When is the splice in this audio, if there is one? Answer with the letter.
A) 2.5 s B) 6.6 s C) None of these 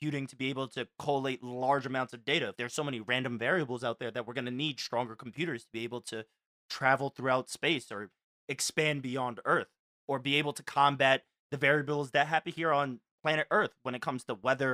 A